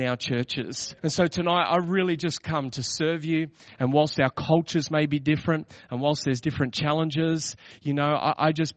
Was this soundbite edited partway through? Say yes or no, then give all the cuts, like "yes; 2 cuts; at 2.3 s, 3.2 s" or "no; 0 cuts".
yes; 2 cuts; at 1.0 s, 3.7 s